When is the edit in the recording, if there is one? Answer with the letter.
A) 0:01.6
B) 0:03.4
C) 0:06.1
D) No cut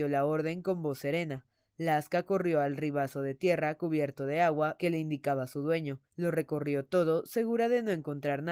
C